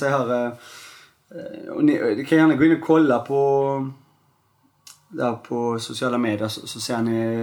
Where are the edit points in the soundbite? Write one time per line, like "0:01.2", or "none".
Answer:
none